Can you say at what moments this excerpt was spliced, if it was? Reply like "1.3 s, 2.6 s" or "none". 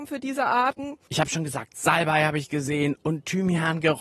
1.1 s